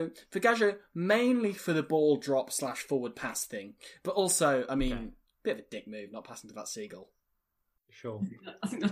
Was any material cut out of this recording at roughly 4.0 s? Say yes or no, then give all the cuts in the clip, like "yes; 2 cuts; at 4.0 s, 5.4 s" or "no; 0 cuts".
no; 0 cuts